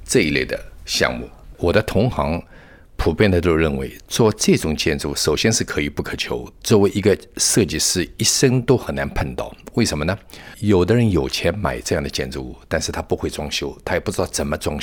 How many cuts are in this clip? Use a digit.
1